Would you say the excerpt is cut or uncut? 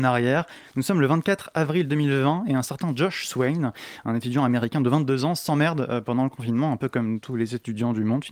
uncut